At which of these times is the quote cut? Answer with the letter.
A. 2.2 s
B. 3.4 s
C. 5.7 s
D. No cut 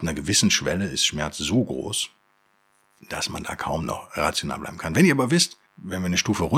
C